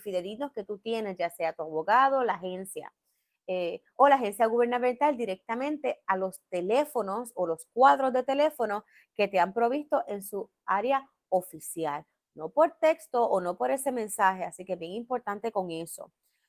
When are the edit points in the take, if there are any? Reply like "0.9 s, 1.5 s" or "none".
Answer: none